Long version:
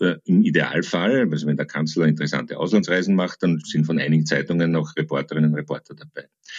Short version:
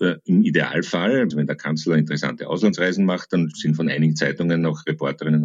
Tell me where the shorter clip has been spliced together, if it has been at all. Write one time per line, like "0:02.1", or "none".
0:01.3

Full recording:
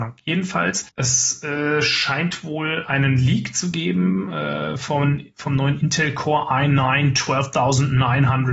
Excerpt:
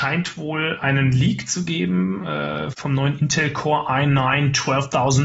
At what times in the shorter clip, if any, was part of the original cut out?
0:02.7

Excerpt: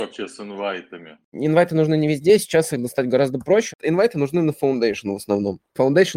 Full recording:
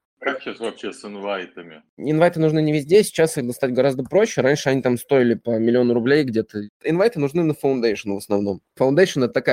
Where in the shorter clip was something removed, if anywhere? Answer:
0:03.7

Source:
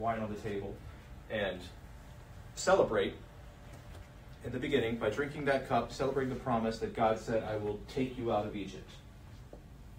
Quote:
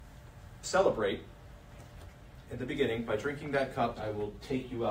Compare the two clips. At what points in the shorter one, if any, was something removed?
0:04.0

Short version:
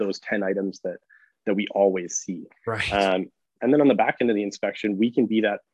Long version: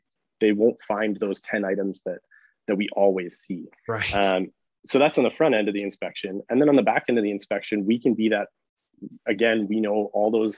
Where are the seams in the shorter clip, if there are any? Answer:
0:03.6

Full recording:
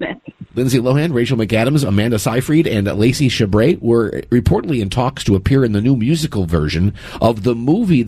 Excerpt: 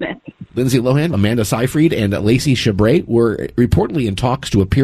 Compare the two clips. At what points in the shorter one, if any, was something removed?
0:01.1

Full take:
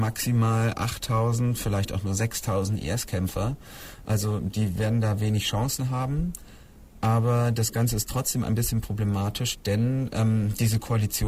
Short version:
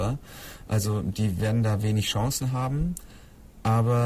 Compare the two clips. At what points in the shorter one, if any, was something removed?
none

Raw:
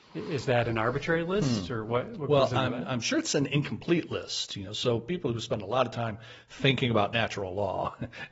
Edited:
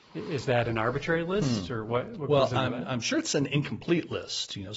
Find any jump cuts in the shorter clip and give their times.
none

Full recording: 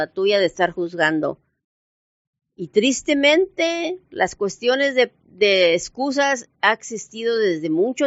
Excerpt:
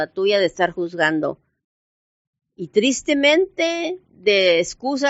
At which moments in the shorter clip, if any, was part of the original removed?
0:04.0

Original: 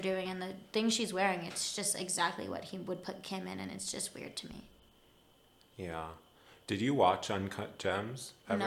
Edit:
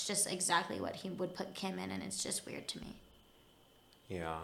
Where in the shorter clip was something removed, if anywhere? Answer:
none

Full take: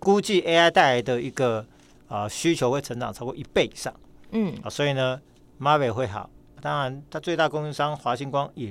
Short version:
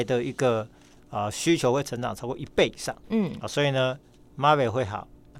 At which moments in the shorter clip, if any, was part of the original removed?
0:03.0

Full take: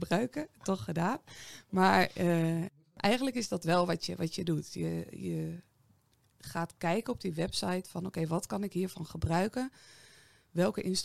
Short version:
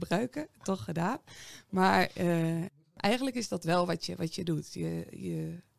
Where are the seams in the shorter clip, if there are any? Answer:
none

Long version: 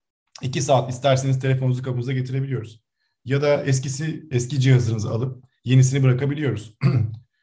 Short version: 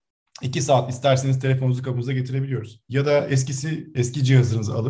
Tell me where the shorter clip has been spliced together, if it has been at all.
0:02.8

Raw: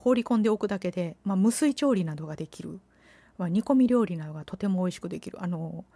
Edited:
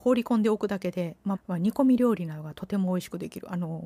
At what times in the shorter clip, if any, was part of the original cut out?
0:01.3

